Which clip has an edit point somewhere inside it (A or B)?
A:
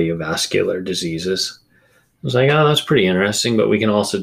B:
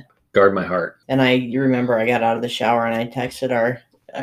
B